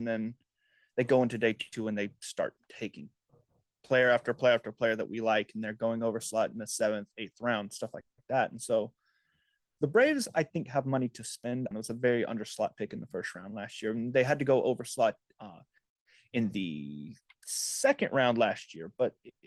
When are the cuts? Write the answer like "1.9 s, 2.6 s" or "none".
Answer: 11.7 s